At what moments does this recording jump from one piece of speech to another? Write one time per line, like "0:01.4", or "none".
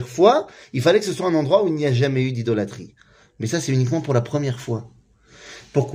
none